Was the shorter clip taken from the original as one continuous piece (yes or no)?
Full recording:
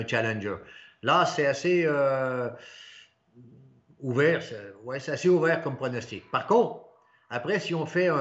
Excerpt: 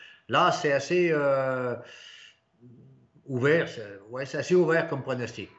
yes